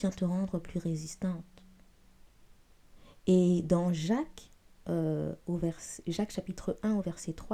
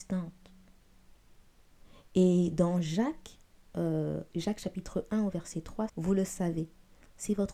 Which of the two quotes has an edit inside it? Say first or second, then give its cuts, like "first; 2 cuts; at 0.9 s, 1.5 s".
second; 2 cuts; at 4.3 s, 5.9 s